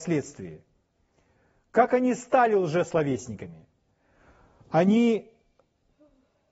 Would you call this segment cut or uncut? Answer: uncut